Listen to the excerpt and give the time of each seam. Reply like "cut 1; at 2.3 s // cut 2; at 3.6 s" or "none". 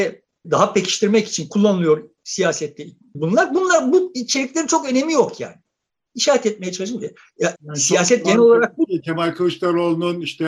cut 1; at 7.6 s